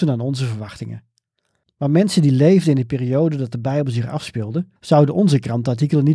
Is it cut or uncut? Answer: cut